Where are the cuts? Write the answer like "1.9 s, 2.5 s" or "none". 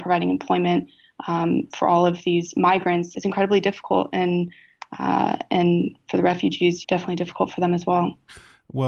3.1 s, 6.8 s

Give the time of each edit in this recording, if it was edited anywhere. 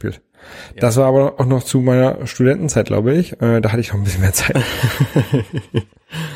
none

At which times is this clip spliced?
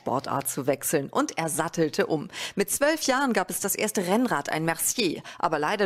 none

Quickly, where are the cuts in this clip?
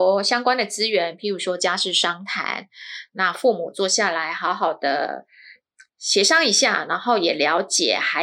none

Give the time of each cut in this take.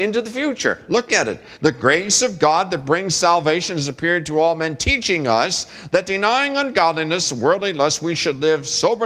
none

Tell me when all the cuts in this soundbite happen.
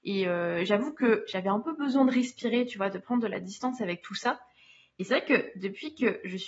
none

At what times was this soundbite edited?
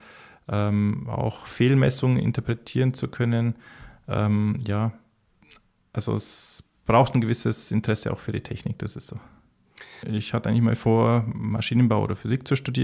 10.0 s

